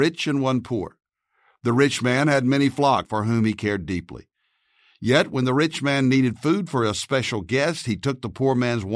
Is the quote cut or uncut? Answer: cut